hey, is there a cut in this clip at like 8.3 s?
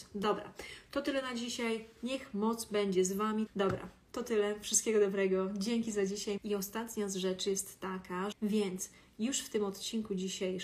yes; 3 cuts; at 3.5 s, 6.4 s, 8.3 s

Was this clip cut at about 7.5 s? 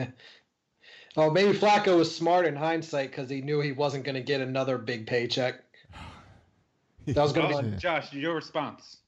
yes; 1 cut; at 7.5 s

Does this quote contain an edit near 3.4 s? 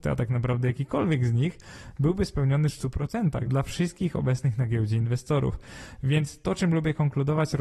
yes; 1 cut; at 3.4 s

